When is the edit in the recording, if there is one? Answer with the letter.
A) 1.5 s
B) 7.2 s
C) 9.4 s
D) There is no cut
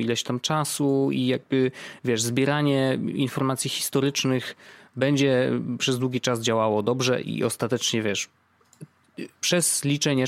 B